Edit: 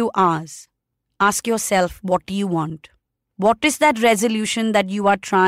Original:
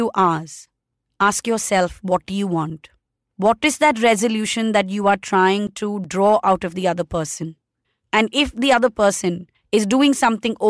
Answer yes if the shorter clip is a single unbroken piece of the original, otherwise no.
yes